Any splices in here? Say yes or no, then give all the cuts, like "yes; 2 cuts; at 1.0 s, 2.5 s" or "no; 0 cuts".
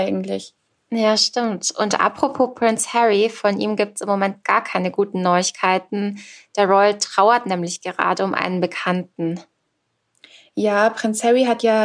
no; 0 cuts